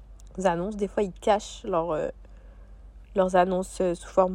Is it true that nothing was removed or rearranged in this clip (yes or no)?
yes